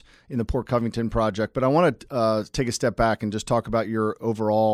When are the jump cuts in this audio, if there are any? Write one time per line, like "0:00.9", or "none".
none